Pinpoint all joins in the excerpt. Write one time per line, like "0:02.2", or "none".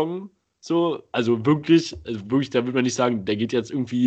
none